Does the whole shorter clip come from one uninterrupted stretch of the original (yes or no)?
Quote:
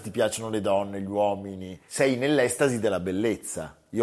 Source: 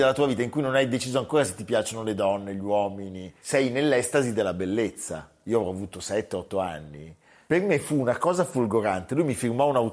yes